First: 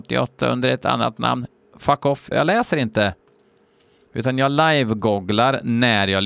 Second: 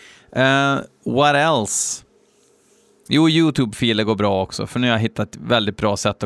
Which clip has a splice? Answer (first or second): first